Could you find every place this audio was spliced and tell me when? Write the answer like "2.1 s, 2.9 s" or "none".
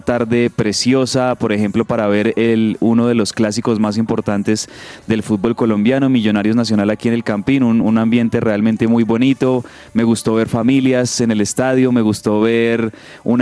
none